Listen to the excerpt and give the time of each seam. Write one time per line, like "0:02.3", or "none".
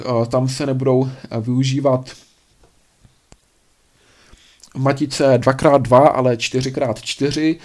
none